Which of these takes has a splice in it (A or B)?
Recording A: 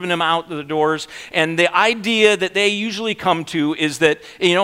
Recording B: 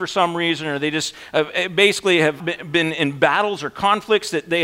B